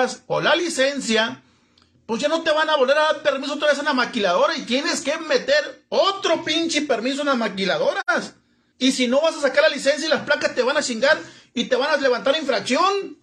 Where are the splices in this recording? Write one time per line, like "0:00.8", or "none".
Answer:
0:08.7